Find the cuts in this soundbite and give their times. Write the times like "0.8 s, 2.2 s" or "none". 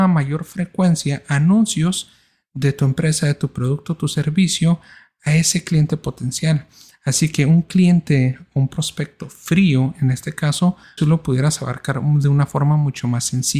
11.0 s